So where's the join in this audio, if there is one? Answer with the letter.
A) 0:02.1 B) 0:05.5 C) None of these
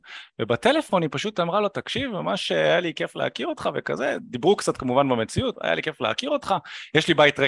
B